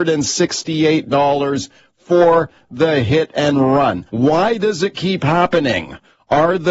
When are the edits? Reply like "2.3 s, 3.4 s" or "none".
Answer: 4.1 s